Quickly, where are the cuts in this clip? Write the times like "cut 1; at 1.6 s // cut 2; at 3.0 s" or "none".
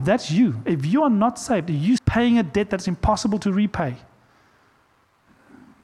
cut 1; at 2.0 s